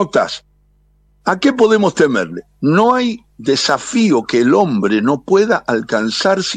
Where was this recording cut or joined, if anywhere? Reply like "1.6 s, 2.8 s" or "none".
1.1 s